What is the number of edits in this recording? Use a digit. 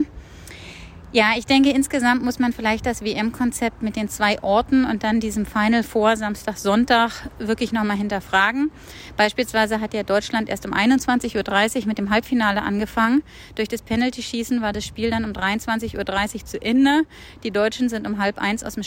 0